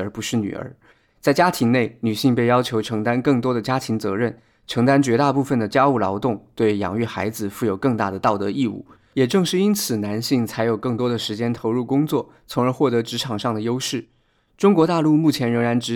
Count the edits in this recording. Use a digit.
1